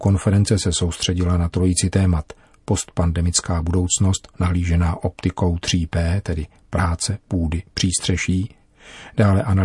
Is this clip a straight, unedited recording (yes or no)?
yes